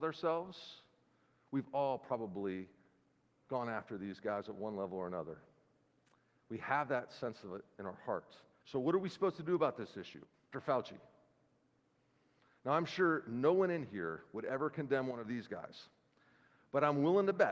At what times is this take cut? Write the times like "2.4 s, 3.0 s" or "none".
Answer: 8.6 s, 10.5 s

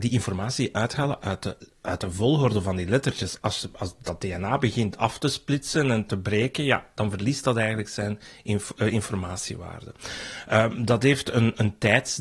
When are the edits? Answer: none

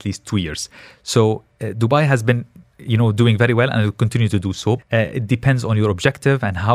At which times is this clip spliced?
4.8 s

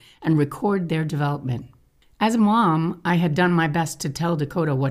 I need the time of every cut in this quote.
2.0 s

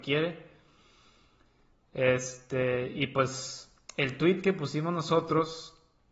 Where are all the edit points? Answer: none

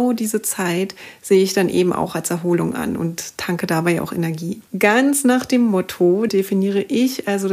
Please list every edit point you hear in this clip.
4.7 s, 6.3 s

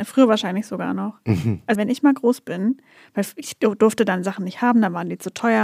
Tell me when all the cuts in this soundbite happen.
1.8 s

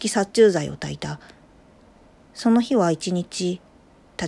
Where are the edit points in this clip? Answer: none

